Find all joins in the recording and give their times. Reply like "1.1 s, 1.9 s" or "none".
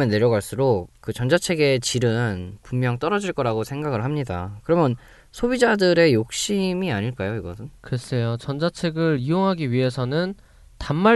7.8 s